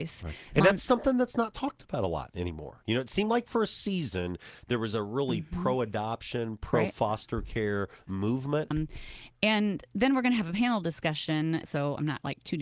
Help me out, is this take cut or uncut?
cut